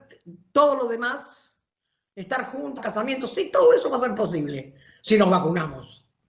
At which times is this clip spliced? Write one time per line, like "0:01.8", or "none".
0:02.8